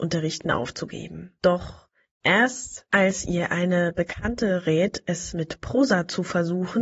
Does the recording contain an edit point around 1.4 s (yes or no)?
yes